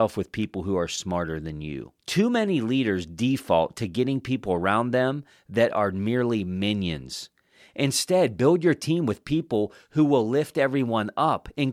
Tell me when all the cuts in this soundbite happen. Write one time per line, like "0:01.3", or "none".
0:02.0